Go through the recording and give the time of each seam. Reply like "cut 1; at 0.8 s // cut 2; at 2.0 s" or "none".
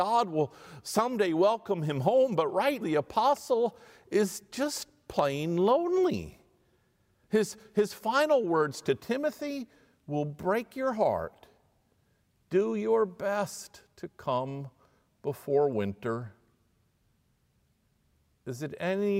cut 1; at 2.8 s

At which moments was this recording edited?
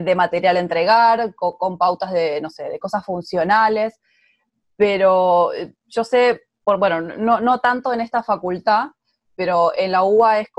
none

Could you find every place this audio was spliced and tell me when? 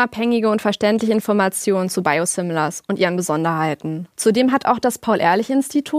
cut 1; at 4.1 s

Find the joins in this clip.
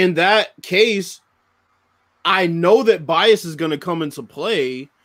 none

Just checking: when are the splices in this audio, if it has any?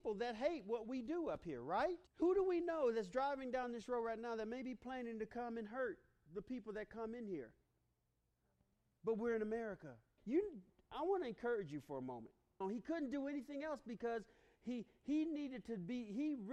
cut 1; at 2.1 s // cut 2; at 10.2 s // cut 3; at 12.6 s

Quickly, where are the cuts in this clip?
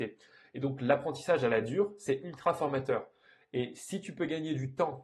none

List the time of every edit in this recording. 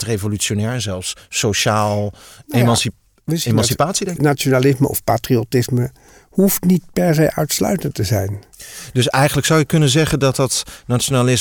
cut 1; at 4.2 s

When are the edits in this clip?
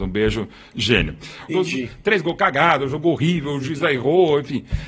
cut 1; at 1.5 s

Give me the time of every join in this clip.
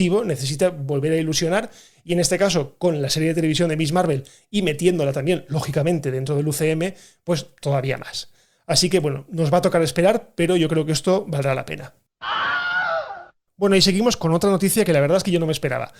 none

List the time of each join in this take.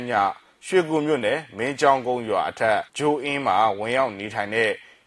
cut 1; at 2.9 s

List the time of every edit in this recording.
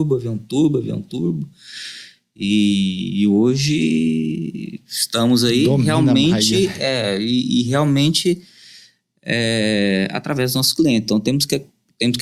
none

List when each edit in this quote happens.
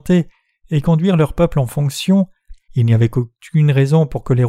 cut 1; at 2.7 s

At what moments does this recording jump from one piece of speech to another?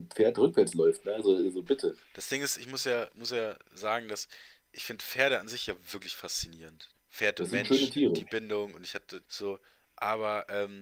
cut 1; at 6.9 s // cut 2; at 9.2 s

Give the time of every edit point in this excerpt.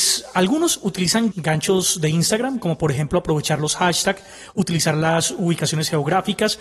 cut 1; at 1.3 s

